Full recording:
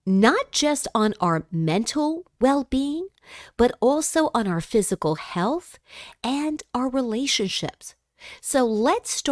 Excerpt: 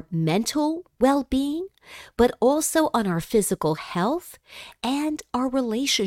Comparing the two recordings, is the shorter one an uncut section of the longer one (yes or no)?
yes